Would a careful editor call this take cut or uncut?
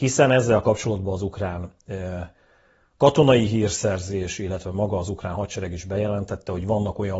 uncut